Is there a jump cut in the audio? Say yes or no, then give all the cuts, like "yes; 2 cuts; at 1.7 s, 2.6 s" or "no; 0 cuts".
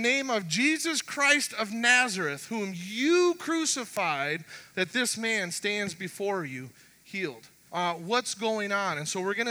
yes; 2 cuts; at 4.7 s, 7.7 s